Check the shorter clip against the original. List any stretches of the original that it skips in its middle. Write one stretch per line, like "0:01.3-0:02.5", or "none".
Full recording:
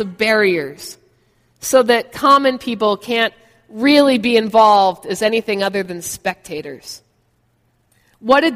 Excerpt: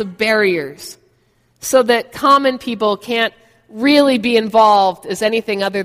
none